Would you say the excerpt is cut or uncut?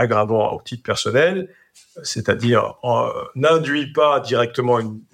uncut